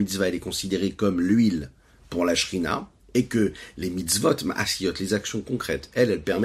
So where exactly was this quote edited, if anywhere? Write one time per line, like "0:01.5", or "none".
none